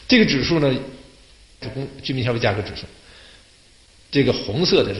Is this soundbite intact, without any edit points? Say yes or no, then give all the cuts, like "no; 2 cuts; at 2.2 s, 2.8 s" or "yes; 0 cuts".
no; 1 cut; at 1.6 s